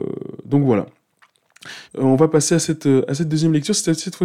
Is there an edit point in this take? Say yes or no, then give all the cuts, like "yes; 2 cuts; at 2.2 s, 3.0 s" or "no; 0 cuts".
yes; 1 cut; at 1.9 s